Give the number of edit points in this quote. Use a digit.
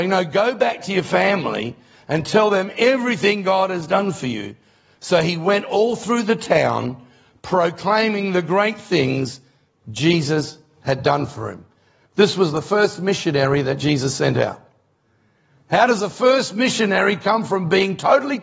0